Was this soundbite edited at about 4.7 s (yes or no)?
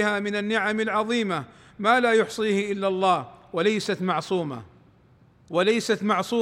no